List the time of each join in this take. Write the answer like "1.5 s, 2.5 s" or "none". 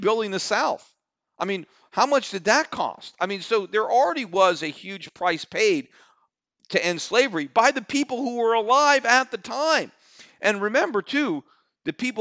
none